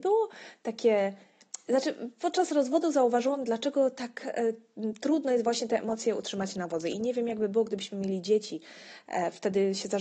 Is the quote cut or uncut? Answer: uncut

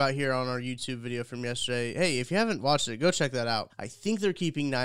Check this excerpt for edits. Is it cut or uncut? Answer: cut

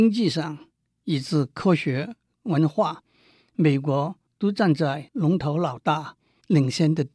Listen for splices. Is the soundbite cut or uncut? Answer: cut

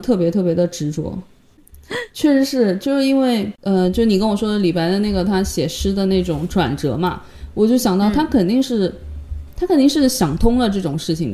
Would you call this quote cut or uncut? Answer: cut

